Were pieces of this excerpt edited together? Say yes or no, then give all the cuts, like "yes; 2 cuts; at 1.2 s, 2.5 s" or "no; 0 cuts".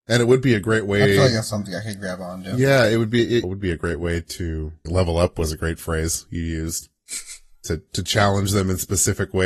yes; 2 cuts; at 3.4 s, 4.9 s